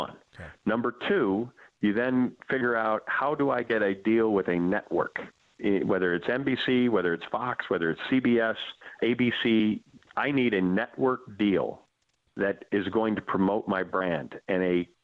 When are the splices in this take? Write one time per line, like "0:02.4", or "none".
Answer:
0:09.0

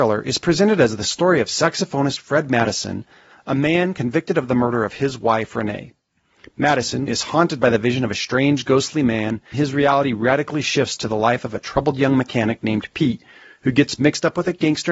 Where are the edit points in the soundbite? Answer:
0:07.1
0:09.5

